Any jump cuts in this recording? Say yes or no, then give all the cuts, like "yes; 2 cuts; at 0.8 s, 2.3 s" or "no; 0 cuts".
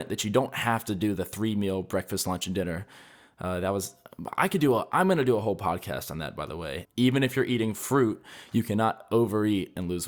yes; 1 cut; at 6.8 s